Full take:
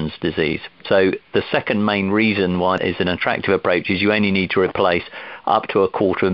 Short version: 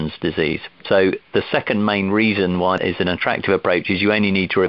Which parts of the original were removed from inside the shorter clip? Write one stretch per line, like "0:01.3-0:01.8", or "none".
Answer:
none